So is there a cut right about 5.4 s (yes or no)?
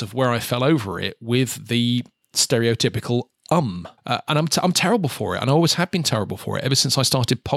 no